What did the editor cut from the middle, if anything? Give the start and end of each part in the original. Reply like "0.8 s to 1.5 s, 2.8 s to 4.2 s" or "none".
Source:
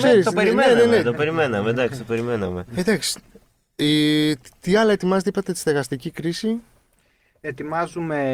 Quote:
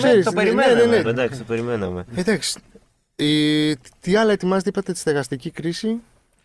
1.0 s to 1.6 s